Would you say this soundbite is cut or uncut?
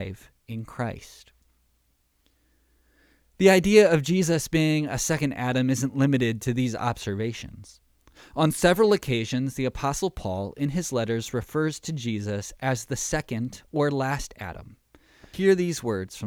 uncut